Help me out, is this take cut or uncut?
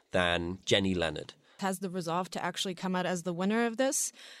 cut